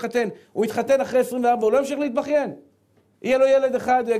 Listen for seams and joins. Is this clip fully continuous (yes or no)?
no